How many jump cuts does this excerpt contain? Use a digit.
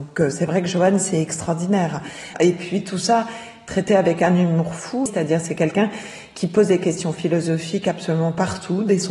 2